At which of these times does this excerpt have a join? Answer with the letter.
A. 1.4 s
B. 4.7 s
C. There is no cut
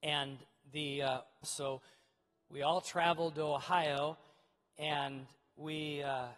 A